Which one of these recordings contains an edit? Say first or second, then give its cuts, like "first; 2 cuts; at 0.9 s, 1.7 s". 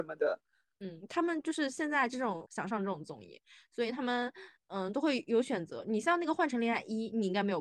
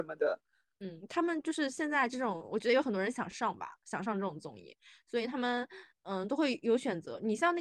first; 1 cut; at 2.4 s